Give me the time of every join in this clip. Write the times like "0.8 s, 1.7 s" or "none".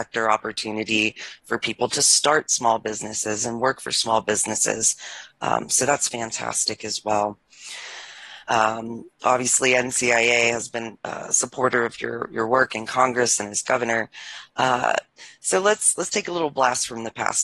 8.5 s